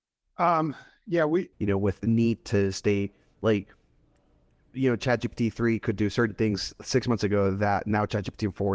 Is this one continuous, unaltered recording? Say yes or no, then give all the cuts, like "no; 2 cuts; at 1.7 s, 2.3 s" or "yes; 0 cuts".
no; 1 cut; at 1.5 s